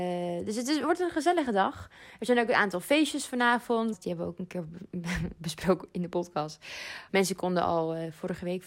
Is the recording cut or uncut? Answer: cut